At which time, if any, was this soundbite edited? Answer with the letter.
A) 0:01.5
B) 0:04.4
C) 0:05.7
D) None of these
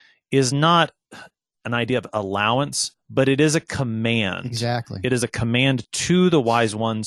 A